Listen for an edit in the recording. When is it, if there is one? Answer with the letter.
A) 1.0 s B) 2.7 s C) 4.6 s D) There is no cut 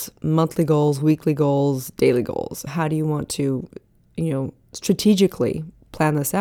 B